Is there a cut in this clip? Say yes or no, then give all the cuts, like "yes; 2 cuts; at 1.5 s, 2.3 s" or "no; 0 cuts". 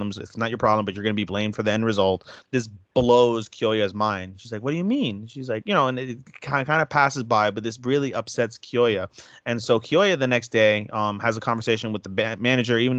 yes; 1 cut; at 2.4 s